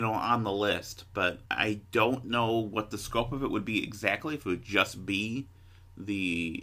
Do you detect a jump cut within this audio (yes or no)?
no